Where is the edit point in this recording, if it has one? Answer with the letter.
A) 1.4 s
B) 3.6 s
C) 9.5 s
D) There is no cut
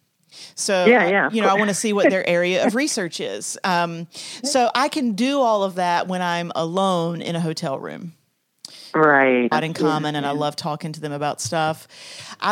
C